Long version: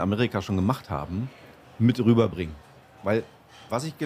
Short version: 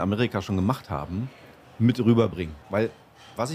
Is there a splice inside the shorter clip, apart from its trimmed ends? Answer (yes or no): yes